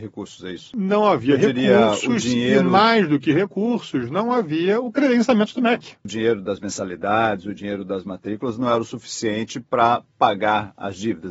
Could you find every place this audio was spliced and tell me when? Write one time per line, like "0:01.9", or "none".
none